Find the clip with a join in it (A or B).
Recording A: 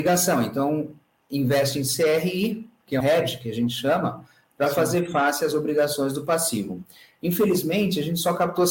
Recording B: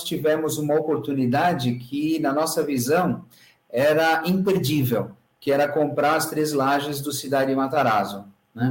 A